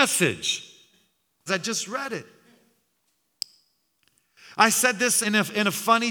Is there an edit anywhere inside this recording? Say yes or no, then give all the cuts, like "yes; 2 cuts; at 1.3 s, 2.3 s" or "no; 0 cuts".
yes; 2 cuts; at 1.5 s, 5.2 s